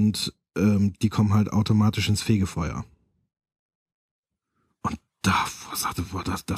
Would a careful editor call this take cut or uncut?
uncut